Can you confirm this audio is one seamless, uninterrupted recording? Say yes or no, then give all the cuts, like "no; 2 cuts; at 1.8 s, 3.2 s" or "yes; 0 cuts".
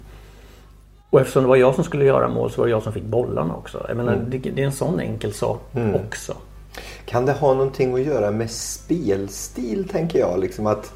yes; 0 cuts